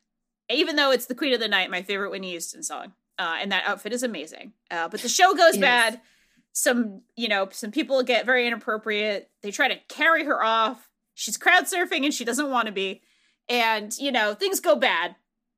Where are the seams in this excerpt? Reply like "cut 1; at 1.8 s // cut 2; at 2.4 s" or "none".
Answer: none